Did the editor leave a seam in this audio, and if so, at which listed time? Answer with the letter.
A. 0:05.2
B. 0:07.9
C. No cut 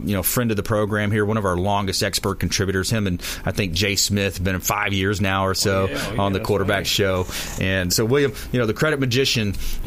B